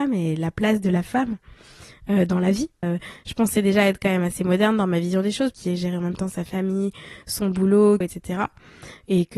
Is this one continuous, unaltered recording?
no; 3 cuts; at 2.8 s, 5.5 s, 8.0 s

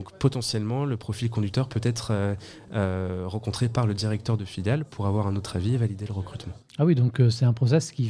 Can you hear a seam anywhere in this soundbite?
no; 0 cuts

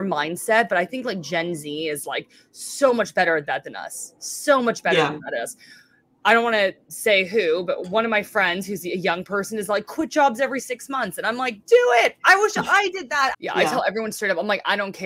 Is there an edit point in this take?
yes; 1 cut; at 13.3 s

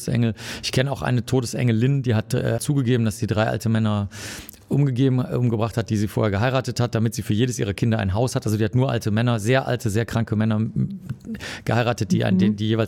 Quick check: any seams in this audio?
yes; 1 cut; at 2.6 s

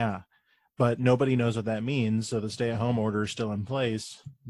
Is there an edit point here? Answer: no; 0 cuts

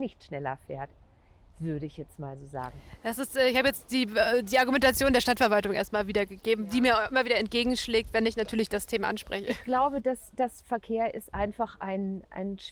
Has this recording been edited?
yes; 1 cut; at 10.6 s

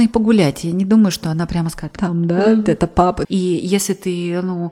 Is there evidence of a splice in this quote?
yes; 2 cuts; at 2.0 s, 3.2 s

